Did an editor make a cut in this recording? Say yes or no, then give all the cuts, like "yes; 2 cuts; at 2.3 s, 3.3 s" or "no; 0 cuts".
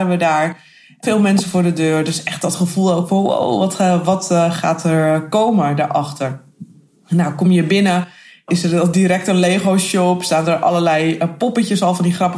no; 0 cuts